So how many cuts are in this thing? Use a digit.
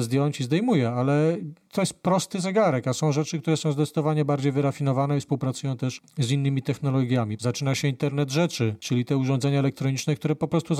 2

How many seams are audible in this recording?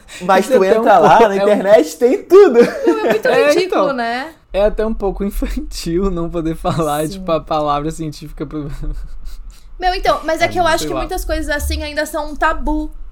1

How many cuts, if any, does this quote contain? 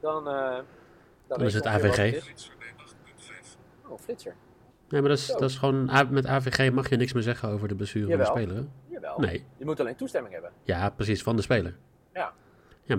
1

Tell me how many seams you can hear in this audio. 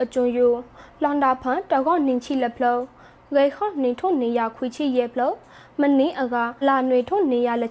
1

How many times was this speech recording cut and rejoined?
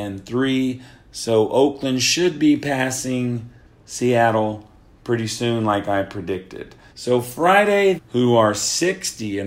2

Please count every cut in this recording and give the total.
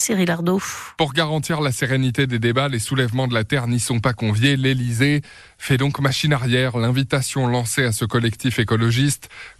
0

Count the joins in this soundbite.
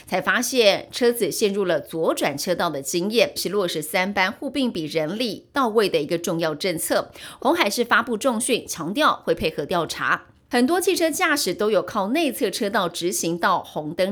2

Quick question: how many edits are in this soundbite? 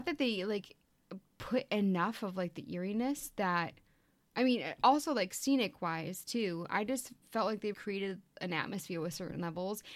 1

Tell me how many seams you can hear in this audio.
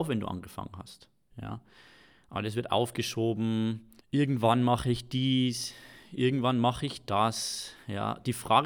2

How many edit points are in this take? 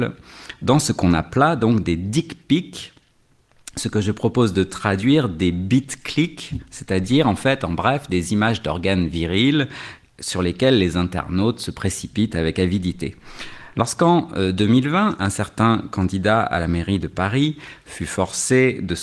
1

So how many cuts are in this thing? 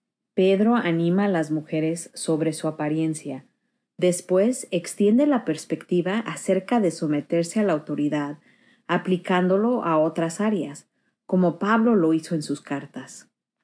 1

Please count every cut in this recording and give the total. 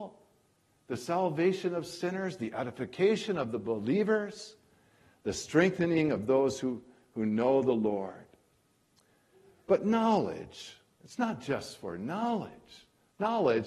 0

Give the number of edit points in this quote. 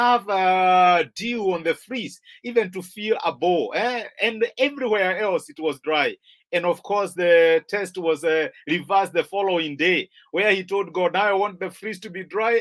0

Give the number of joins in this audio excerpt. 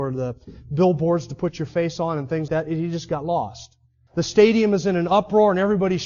2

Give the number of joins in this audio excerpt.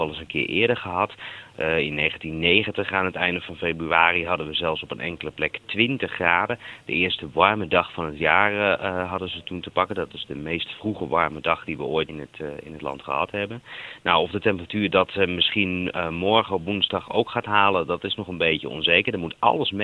1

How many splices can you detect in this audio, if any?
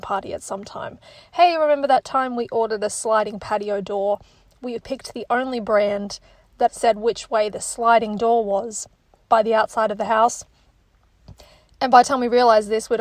1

